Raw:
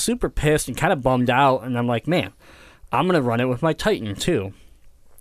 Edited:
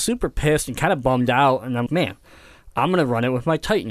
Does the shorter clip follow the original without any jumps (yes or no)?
no